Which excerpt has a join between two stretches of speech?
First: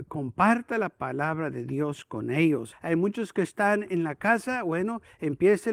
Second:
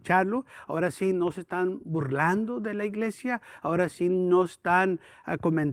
first; 1 cut; at 2.7 s

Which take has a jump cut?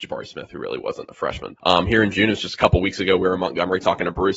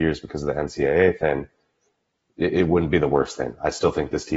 first; 1 cut; at 1.6 s

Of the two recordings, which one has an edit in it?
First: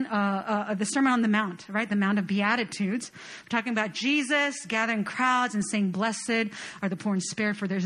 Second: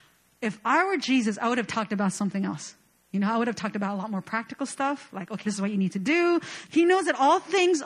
second; 2 cuts; at 5.5 s, 6.7 s

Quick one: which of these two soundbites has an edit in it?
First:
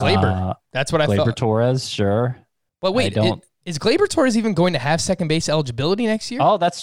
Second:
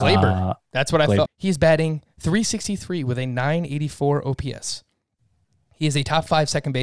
second; 1 cut; at 1.2 s

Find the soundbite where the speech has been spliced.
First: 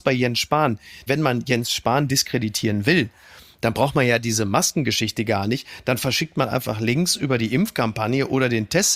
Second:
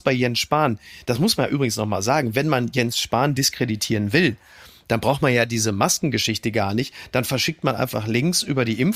first; 1 cut; at 1.1 s

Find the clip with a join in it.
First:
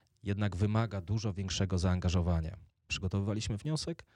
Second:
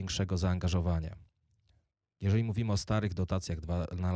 first; 1 cut; at 2.9 s

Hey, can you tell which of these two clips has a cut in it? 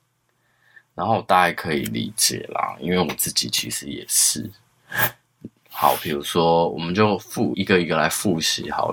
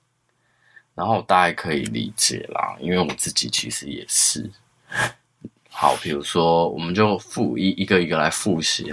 first; 1 cut; at 7.5 s

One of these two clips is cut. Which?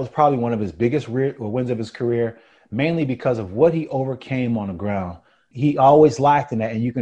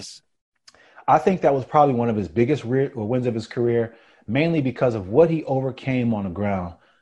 first; 1 cut; at 5.5 s

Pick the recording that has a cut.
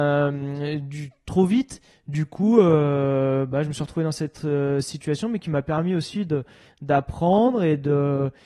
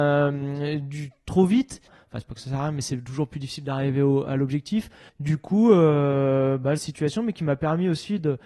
second; 3 cuts; at 1.9 s, 5.1 s, 6.8 s

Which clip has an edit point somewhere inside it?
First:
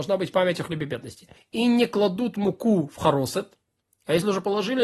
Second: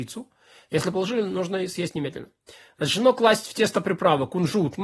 first; 1 cut; at 1.4 s

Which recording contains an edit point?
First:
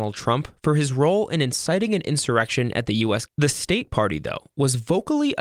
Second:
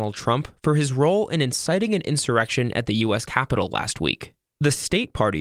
first; 1 cut; at 3.3 s

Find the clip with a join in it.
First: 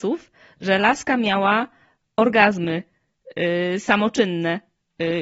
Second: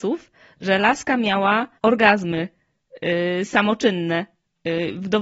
second; 1 cut; at 1.8 s

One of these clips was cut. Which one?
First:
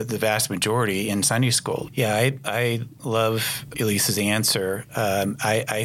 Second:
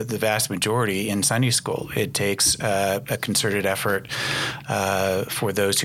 first; 2 cuts; at 1.9 s, 3.7 s

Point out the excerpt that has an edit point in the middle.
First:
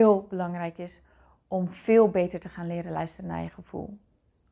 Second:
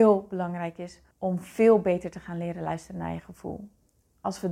second; 1 cut; at 1.1 s

